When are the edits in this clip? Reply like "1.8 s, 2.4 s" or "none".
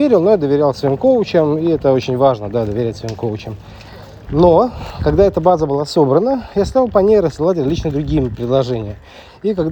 4.3 s